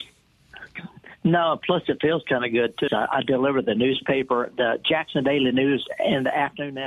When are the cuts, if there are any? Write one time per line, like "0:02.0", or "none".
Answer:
0:02.9